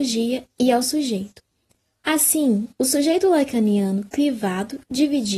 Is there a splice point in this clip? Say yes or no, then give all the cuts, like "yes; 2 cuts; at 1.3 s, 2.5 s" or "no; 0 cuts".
no; 0 cuts